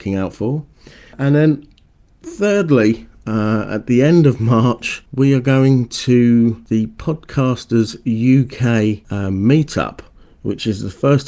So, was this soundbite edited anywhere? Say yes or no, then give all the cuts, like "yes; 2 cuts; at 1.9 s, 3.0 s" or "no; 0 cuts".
no; 0 cuts